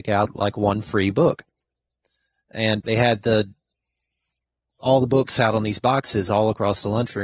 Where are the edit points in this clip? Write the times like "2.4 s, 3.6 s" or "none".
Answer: 2.8 s